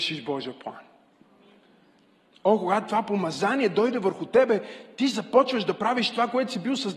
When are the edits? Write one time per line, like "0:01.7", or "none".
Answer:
none